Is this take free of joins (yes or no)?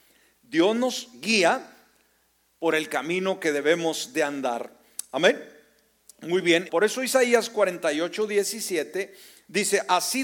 no